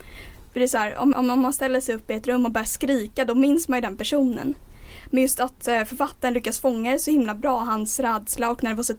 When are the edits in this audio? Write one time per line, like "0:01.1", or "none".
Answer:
0:01.1